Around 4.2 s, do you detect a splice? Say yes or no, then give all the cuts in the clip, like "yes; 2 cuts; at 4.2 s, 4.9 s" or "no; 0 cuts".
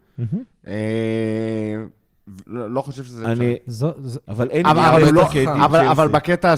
yes; 2 cuts; at 2.4 s, 4.2 s